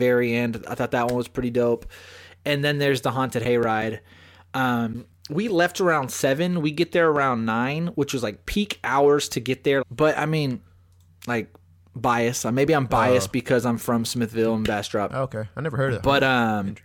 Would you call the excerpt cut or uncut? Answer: cut